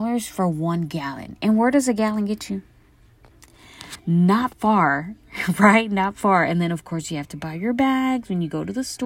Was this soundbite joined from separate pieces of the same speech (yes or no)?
no